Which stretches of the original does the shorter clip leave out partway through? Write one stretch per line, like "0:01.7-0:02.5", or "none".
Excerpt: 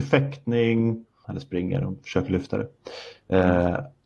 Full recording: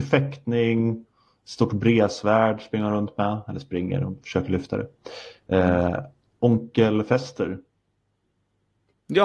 0:01.2-0:03.4